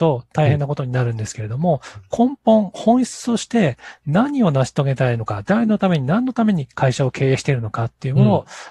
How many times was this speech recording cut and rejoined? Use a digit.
0